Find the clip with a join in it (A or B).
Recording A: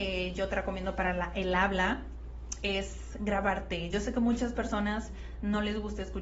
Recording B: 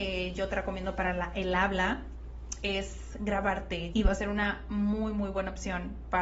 B